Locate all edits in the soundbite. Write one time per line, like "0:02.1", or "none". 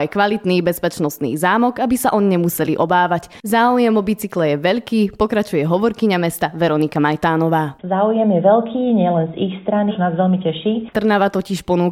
0:09.9
0:10.9